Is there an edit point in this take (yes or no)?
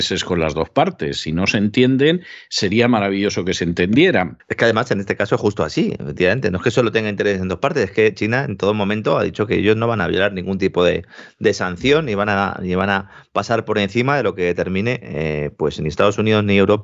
yes